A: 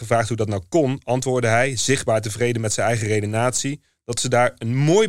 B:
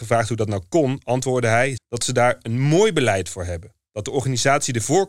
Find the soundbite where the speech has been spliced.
B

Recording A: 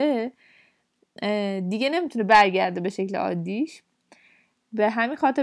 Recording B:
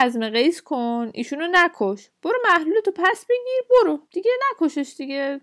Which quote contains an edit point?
B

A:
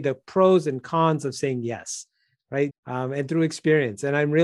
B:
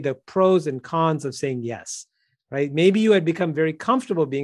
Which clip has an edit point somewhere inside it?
A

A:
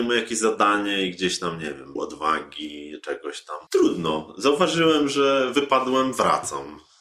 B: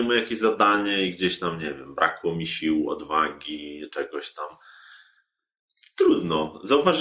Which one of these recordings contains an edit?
A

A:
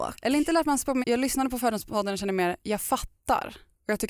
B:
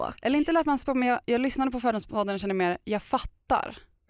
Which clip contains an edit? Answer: A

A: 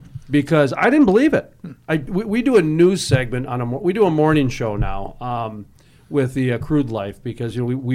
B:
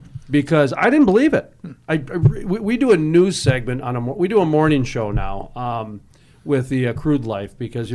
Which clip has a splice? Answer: A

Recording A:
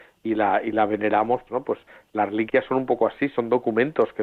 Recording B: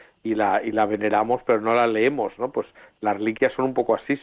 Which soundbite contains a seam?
A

